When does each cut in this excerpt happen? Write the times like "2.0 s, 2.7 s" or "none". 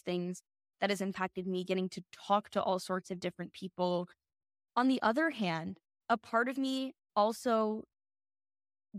4.6 s